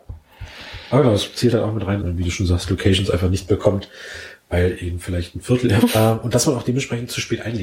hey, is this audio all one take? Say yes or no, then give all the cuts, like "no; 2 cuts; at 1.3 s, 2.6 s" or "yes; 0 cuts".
no; 2 cuts; at 2.0 s, 5.8 s